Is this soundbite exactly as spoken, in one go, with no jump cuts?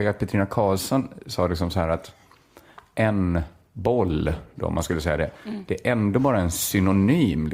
yes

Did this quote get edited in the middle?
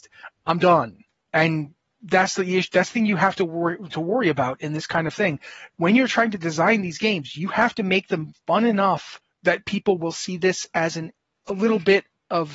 no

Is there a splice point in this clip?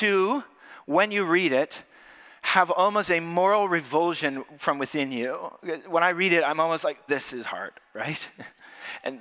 yes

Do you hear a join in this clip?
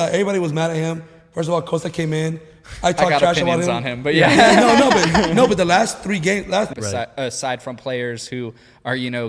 yes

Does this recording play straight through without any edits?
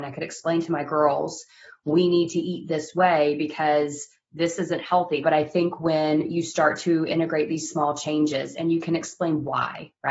no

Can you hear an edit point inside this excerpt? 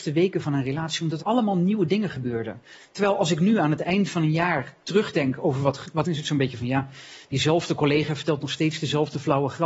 yes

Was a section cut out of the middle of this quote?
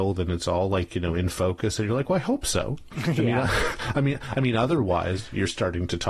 no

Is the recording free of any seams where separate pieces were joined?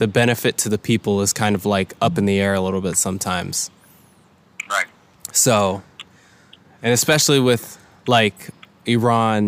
yes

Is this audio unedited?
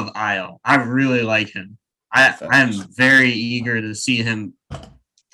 yes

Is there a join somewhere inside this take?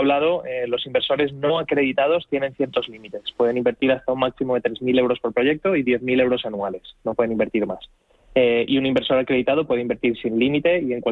no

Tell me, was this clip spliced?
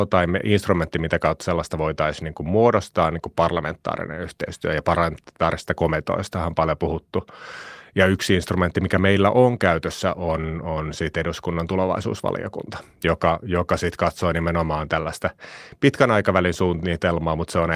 no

